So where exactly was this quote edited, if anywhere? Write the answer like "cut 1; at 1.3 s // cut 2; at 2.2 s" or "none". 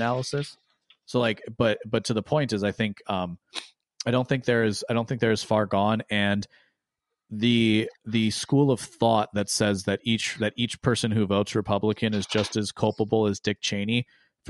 none